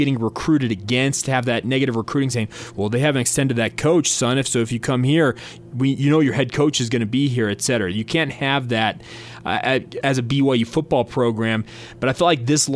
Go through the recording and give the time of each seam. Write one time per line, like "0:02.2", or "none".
0:10.0